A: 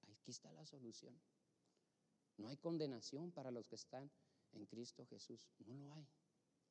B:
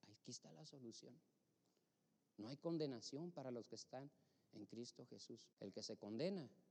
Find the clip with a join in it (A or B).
B